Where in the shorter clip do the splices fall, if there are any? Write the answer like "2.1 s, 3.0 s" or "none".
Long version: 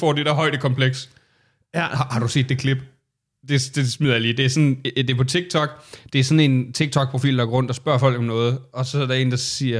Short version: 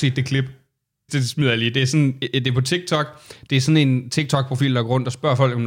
1.1 s